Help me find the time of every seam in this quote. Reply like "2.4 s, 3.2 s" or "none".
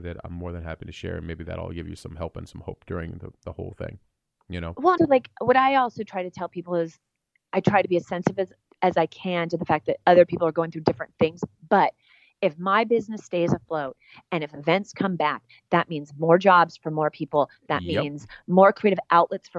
5.0 s